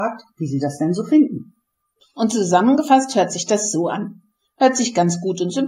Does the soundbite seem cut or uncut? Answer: uncut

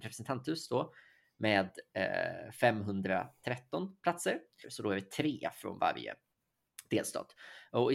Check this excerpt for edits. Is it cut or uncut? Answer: cut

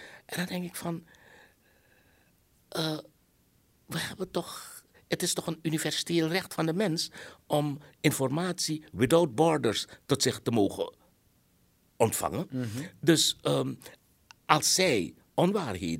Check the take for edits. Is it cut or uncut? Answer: uncut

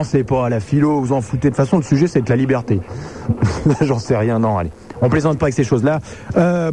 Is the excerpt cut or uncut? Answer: uncut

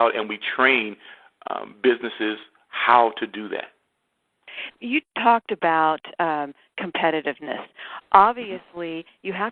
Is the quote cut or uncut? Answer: uncut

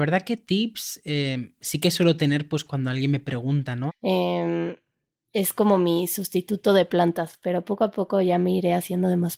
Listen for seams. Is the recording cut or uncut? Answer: cut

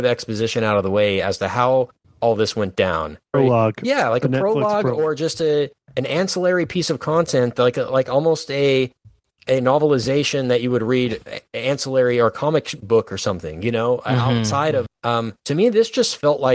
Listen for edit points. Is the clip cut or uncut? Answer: cut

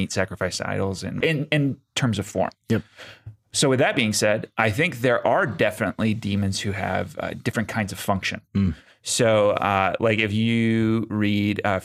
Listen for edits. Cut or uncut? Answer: cut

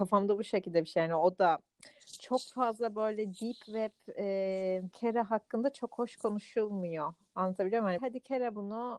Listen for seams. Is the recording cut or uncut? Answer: cut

